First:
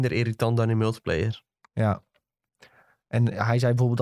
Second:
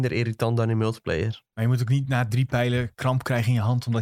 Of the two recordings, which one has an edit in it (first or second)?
second